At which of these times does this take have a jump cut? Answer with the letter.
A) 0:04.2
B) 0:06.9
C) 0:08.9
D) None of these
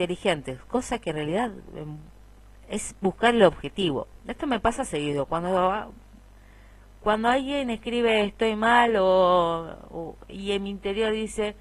A